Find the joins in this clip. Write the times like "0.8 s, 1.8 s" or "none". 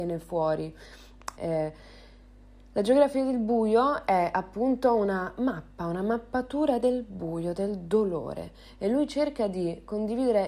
1.4 s

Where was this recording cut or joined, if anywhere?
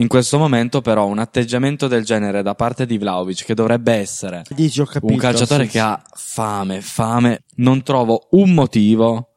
4.5 s, 7.4 s

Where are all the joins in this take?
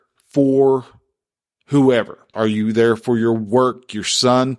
2.3 s

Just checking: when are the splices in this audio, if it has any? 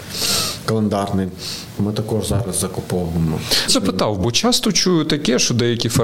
1.8 s, 3.7 s

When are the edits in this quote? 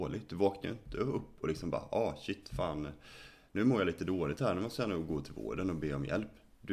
none

